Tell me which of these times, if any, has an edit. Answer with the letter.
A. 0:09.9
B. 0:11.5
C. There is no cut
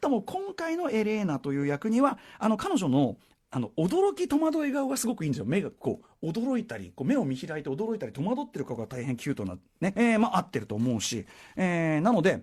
A